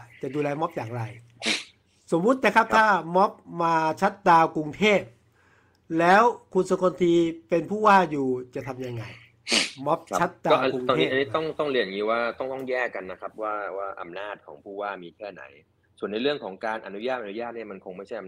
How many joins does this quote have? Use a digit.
0